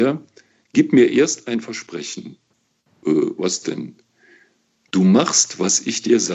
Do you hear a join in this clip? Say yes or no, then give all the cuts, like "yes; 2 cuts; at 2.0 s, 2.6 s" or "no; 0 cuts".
no; 0 cuts